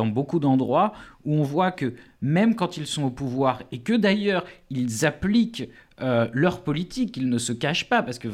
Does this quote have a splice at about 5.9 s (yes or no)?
no